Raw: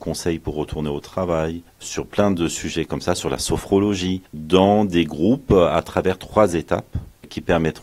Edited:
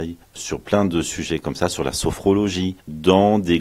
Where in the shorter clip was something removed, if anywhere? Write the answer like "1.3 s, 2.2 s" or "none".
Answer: none